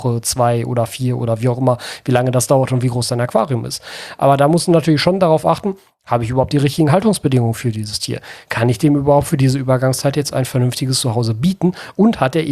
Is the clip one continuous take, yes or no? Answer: yes